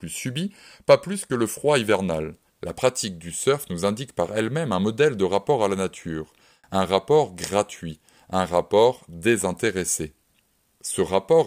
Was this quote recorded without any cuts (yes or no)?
no